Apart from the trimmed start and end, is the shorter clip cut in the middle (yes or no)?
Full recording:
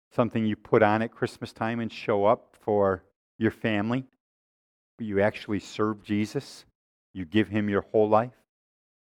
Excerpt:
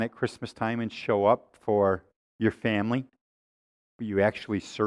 no